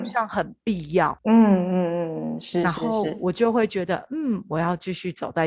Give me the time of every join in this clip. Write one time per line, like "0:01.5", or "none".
none